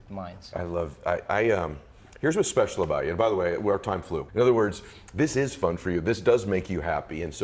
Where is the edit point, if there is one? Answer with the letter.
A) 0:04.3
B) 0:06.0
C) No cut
A